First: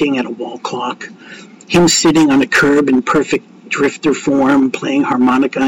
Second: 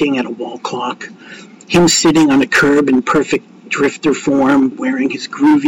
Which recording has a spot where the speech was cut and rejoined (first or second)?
second